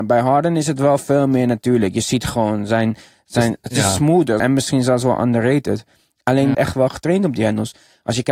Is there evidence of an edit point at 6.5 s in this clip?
yes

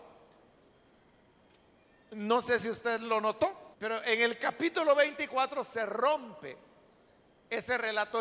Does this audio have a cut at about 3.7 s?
yes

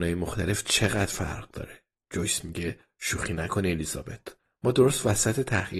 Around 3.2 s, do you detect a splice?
no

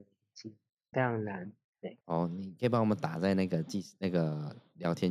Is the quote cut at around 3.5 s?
no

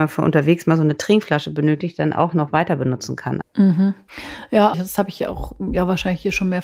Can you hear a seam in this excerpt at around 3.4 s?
yes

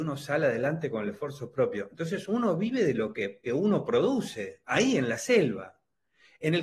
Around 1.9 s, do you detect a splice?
yes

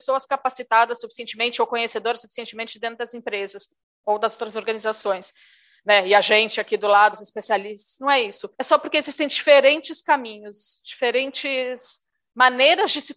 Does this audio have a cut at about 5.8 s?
no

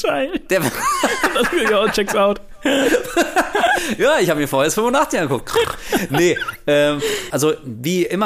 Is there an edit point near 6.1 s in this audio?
no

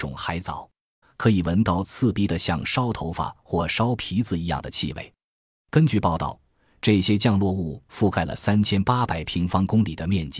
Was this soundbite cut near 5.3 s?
no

